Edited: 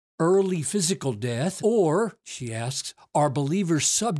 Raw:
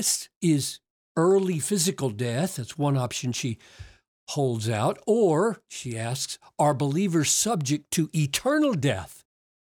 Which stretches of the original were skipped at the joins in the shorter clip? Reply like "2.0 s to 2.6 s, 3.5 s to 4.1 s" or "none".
2.6 s to 5.0 s